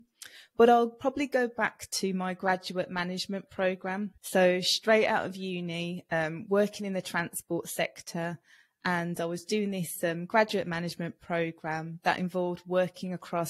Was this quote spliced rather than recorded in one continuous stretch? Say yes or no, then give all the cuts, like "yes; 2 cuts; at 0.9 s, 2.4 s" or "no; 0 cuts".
yes; 1 cut; at 4.2 s